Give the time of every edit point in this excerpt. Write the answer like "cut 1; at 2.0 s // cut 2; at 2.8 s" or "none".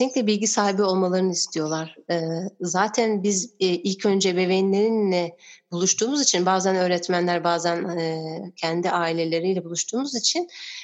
none